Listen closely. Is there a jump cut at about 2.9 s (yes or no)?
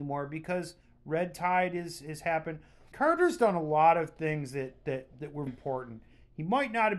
yes